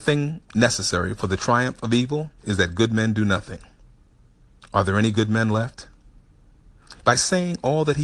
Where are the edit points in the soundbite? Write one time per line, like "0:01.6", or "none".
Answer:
0:07.0

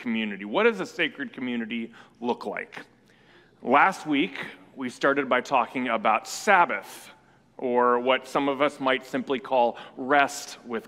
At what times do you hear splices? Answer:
none

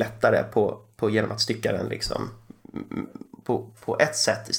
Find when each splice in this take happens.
none

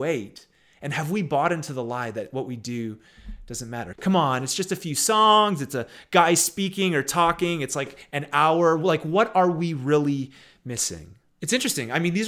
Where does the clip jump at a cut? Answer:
0:03.9
0:11.3

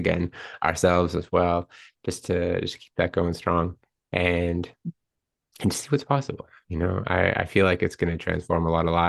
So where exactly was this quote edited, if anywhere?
none

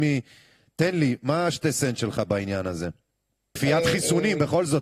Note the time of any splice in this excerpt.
0:03.6

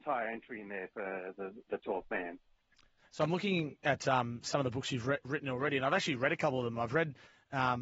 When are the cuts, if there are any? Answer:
none

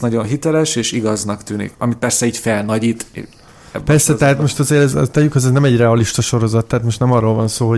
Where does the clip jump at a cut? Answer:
0:01.7
0:04.9

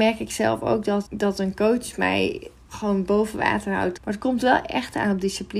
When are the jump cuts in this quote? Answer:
0:01.1
0:04.0

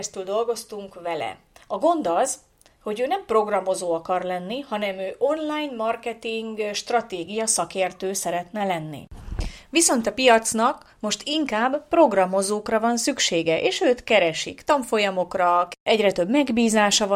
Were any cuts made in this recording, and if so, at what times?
none

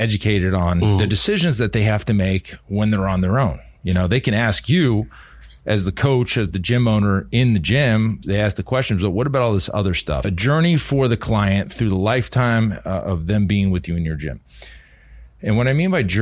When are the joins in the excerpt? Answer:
0:08.2
0:10.2

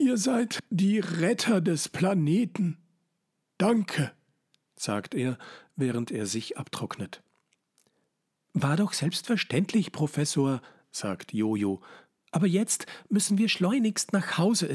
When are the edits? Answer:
none

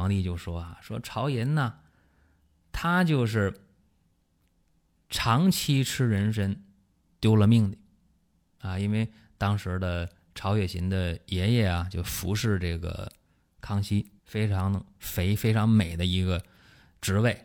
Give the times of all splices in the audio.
0:14.2

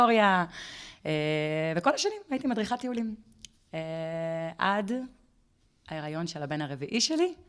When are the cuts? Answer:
none

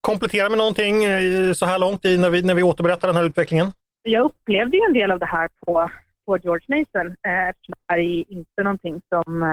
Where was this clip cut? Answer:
none

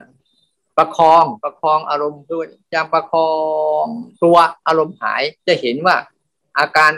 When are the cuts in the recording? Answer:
0:01.4
0:04.1
0:05.4

